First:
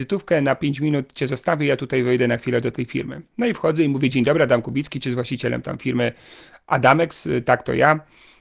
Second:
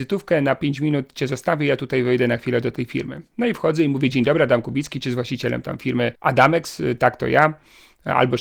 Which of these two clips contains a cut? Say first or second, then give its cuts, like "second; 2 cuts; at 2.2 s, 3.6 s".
second; 1 cut; at 6.1 s